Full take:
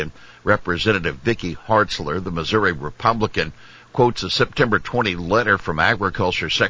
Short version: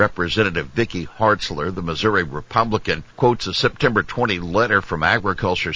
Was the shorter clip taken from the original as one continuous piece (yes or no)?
no